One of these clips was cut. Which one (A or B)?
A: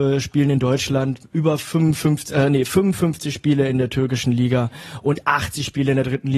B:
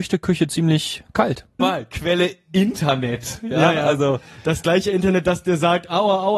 B